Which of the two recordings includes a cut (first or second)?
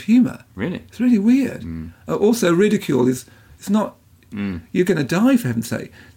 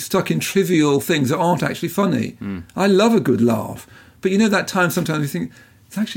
first